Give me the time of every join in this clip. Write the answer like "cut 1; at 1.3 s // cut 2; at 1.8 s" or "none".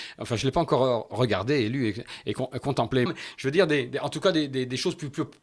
cut 1; at 3.1 s